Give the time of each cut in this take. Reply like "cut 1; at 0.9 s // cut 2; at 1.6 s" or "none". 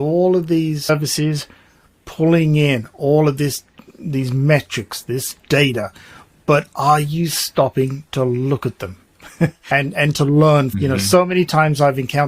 none